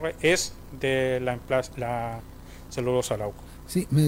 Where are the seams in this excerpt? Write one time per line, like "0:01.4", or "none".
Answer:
none